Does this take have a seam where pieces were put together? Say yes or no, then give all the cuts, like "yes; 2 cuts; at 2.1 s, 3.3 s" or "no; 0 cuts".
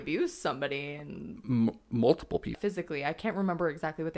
yes; 1 cut; at 2.5 s